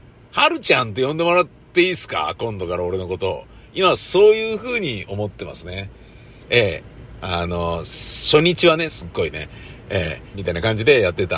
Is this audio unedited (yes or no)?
no